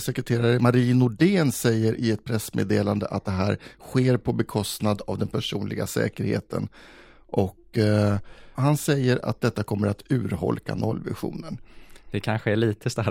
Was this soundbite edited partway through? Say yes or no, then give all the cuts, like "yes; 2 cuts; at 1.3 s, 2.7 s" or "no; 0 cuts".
yes; 1 cut; at 8.5 s